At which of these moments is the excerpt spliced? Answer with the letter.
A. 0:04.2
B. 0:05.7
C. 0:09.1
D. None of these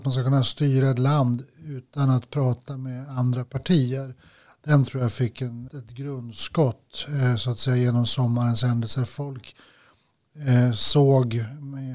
B